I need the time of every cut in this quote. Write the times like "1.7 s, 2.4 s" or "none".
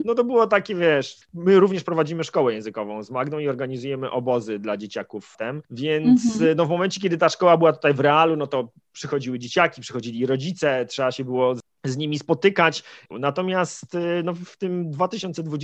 5.6 s, 13.1 s